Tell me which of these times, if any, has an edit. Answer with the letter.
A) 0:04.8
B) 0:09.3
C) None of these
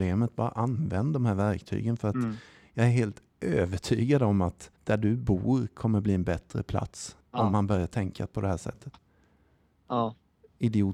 A